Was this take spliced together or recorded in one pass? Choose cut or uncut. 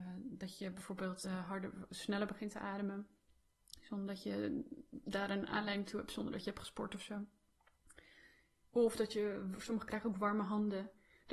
uncut